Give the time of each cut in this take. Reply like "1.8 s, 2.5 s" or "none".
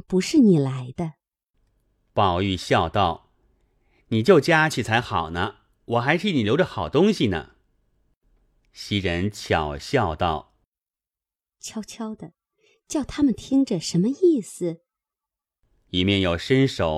none